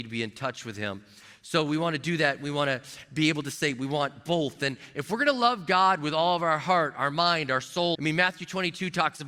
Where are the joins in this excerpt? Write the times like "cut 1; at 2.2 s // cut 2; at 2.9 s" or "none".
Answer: cut 1; at 7.9 s